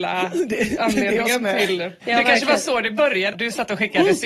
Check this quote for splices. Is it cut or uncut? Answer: cut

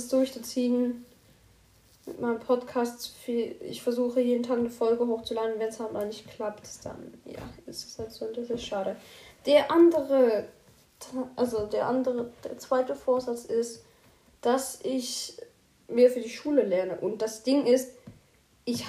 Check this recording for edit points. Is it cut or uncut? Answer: uncut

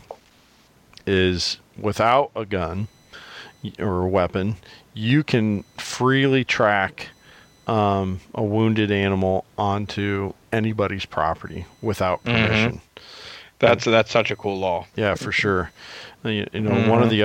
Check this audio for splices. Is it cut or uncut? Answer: cut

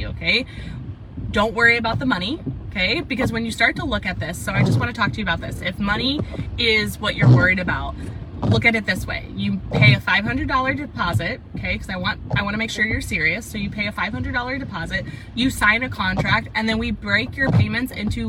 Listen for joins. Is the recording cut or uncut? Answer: uncut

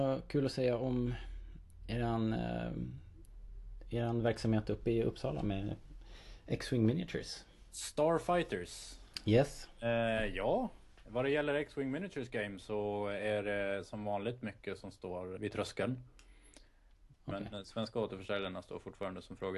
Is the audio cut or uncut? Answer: cut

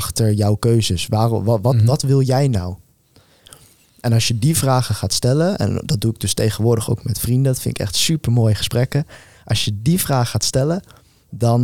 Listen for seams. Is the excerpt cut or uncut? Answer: uncut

